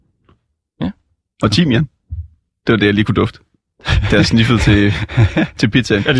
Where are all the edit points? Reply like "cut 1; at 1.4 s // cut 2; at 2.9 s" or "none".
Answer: none

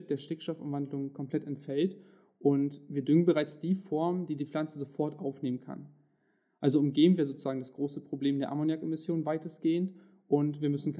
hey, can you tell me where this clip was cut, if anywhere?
none

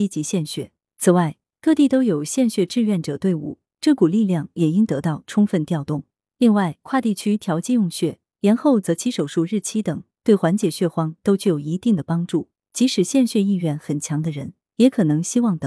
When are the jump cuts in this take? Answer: cut 1; at 12.6 s

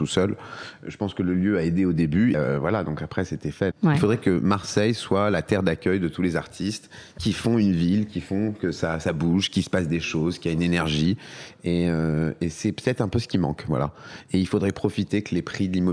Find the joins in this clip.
cut 1; at 2.3 s // cut 2; at 3.7 s

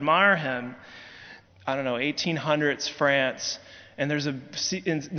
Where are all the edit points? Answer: cut 1; at 1.5 s

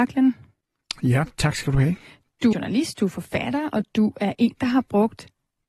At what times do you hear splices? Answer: cut 1; at 2.5 s

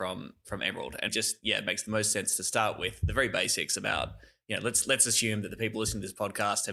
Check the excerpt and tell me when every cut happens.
cut 1; at 1.1 s

